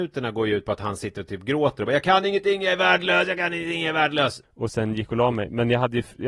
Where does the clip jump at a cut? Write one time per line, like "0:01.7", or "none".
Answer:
0:04.4